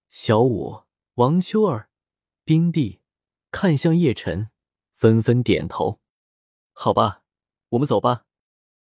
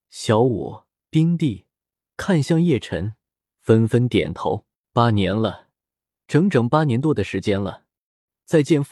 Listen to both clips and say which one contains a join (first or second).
second